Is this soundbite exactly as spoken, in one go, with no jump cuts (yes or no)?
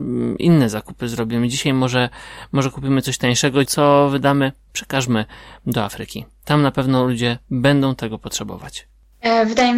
no